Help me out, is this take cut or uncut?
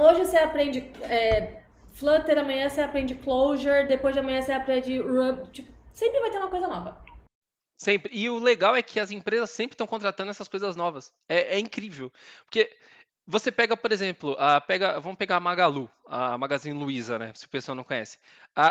uncut